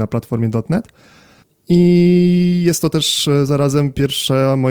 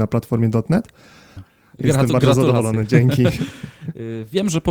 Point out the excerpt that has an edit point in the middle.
second; 1 cut; at 1.4 s

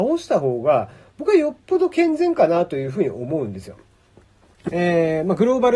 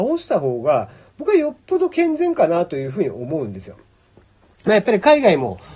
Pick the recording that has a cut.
first; 1 cut; at 4.7 s

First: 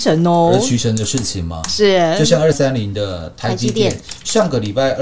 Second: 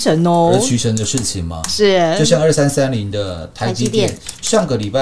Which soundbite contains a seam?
first; 1 cut; at 2.5 s

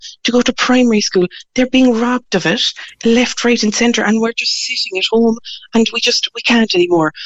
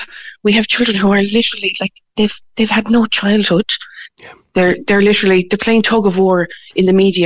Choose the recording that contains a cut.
second; 1 cut; at 4.1 s

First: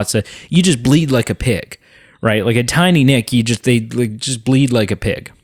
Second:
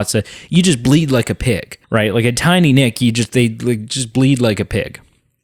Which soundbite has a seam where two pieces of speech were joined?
second; 1 cut; at 1.8 s

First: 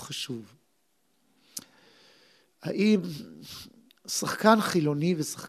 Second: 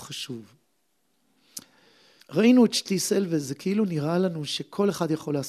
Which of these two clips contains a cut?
second; 1 cut; at 2.2 s

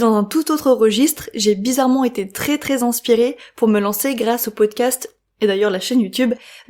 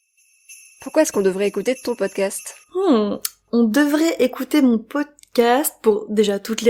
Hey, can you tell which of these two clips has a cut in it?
second; 1 cut; at 2.6 s

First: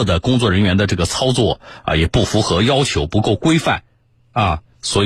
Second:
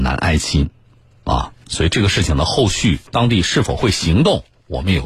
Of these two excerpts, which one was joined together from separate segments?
second; 1 cut; at 3.1 s

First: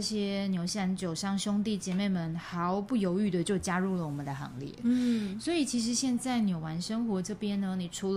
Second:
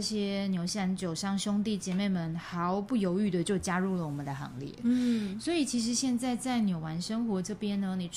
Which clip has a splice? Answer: first; 1 cut; at 6.2 s

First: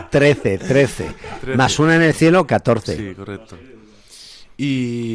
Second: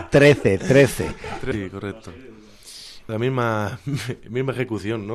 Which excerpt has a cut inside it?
second; 2 cuts; at 1.5 s, 3.1 s

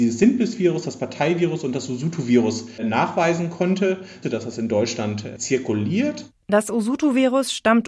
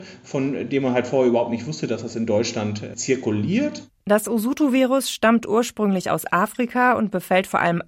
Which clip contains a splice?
first; 1 cut; at 4.2 s

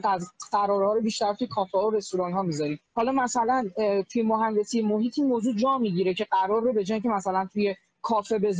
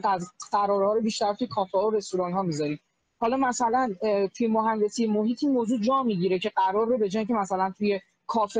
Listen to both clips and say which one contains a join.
first; 1 cut; at 2.9 s

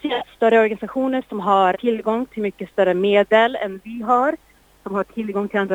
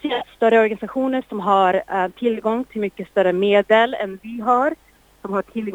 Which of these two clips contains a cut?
first; 1 cut; at 1.7 s

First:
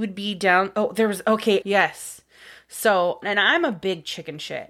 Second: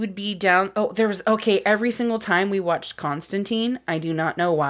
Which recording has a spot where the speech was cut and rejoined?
first; 2 cuts; at 1.6 s, 3.2 s

